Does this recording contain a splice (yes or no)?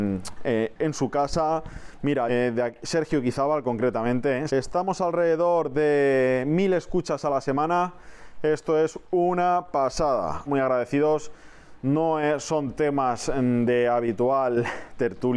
yes